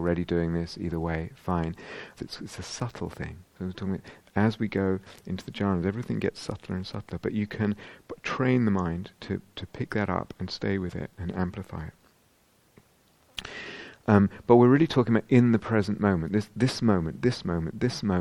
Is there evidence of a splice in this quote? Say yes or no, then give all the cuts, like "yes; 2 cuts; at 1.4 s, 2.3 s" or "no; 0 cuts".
yes; 1 cut; at 2.2 s